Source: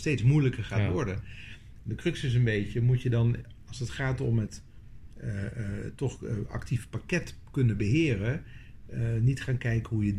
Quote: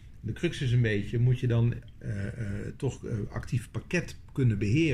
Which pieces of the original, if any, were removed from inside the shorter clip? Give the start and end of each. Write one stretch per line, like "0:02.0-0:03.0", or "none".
0:03.6-0:05.2

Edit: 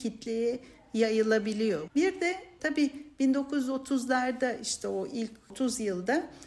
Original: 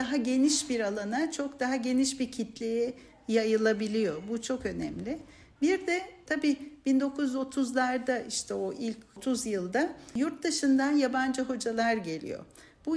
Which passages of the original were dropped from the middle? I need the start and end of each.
0:04.2-0:05.5

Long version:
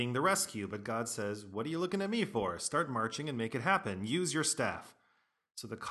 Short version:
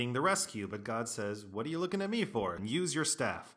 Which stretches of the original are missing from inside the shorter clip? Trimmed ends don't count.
0:02.6-0:04.0

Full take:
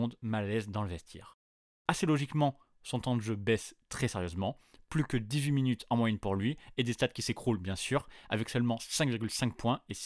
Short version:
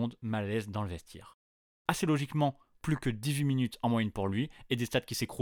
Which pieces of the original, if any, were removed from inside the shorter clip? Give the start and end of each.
0:02.7-0:04.8

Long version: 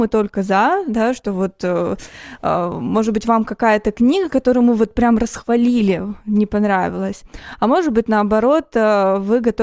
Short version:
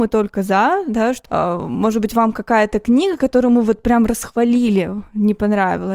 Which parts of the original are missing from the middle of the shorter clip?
0:01.2-0:02.4

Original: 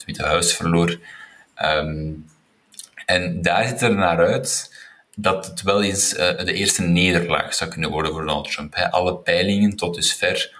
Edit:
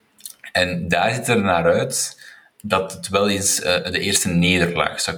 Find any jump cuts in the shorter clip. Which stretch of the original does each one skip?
none

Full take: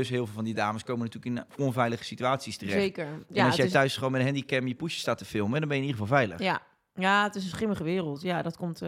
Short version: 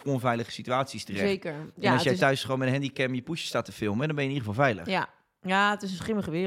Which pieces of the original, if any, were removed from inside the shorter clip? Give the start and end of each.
none

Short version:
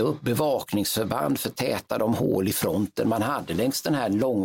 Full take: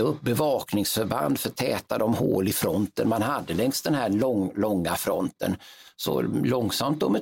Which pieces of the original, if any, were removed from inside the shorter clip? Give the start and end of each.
none

